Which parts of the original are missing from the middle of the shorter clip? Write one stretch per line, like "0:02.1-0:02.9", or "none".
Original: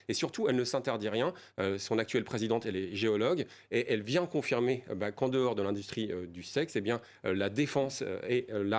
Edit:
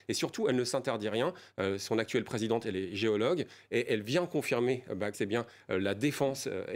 0:05.1-0:06.7